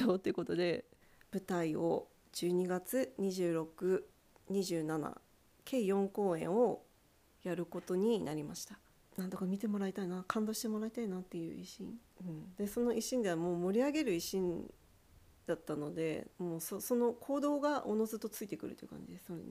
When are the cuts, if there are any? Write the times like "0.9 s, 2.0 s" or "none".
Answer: 9.1 s, 16.3 s